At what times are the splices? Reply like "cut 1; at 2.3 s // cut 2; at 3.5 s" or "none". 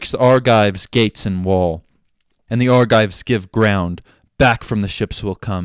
cut 1; at 2.5 s